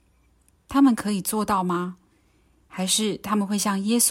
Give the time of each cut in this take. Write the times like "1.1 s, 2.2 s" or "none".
2.6 s